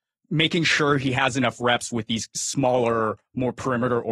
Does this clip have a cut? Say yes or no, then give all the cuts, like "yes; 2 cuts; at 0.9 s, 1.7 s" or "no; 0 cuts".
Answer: no; 0 cuts